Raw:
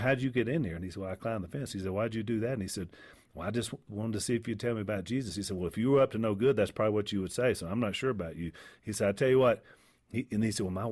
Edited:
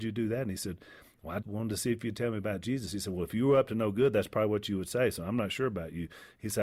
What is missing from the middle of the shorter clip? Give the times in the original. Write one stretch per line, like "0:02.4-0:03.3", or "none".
0:03.5-0:03.8